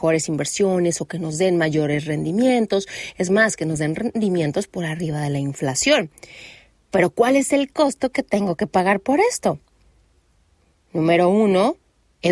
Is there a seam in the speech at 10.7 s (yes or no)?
no